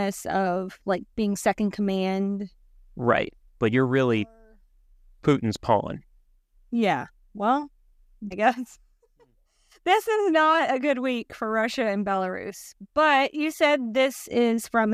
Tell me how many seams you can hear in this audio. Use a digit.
1